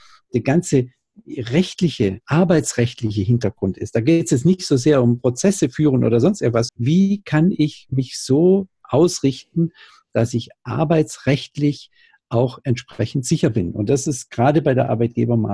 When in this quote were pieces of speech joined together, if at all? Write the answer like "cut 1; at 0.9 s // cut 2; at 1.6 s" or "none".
cut 1; at 6.7 s